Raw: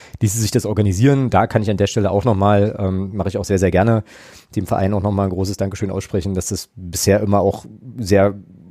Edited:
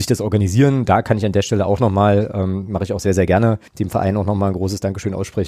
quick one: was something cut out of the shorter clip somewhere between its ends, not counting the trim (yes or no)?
yes